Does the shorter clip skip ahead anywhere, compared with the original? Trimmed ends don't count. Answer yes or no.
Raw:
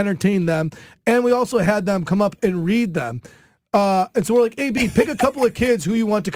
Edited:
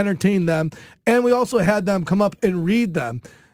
no